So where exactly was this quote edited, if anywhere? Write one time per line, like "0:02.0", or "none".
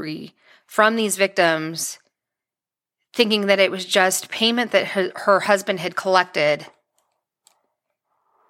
none